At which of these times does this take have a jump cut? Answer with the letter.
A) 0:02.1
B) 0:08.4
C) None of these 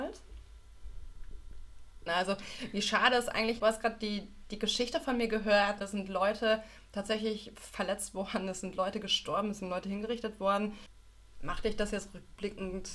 A